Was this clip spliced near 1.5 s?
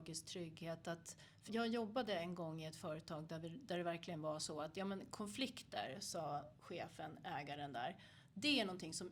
yes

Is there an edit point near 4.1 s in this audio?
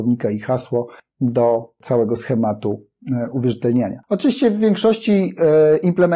no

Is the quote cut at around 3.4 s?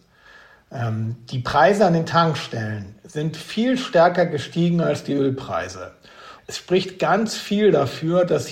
no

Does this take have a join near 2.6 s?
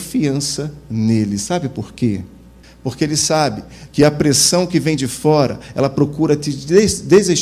yes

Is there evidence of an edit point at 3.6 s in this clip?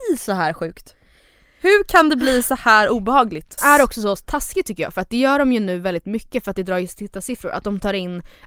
yes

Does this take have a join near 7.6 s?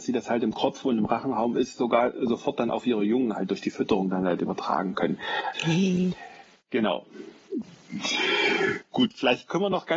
yes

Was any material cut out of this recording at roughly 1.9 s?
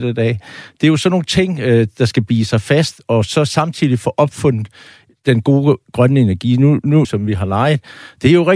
no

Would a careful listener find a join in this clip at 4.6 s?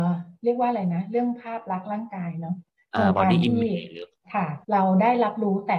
yes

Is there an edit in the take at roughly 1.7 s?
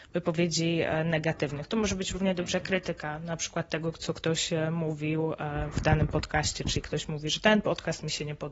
no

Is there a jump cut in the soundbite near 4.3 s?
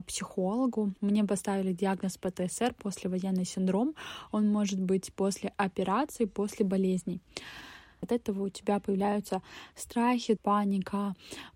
no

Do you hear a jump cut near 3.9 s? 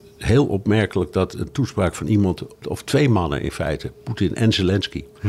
no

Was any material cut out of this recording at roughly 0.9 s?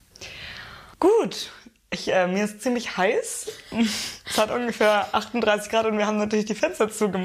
yes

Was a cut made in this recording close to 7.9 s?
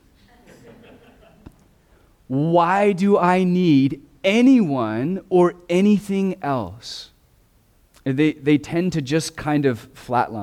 yes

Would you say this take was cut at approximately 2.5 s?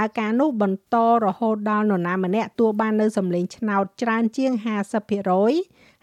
yes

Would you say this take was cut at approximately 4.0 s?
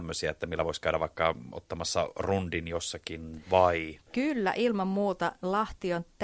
no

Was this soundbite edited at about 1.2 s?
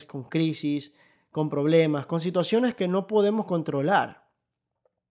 no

